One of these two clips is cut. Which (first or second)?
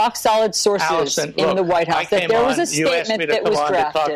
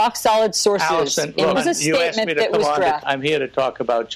second